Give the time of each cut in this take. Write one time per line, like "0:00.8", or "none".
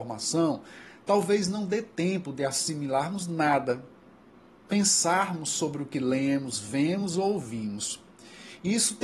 none